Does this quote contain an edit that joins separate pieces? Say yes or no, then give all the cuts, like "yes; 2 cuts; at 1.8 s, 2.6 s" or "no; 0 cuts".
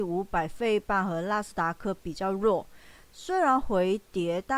no; 0 cuts